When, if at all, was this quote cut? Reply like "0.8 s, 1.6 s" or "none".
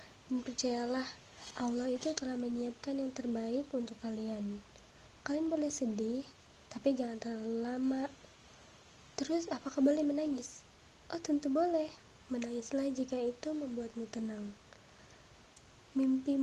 none